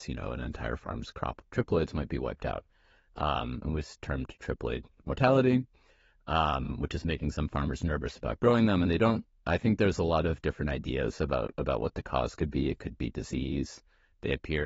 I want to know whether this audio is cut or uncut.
uncut